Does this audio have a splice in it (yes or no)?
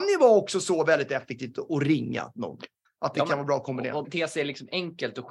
yes